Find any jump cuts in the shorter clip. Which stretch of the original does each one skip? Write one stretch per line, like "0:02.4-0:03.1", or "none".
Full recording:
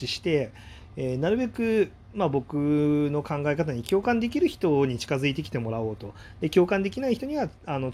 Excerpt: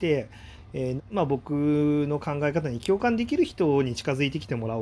0:01.2-0:02.0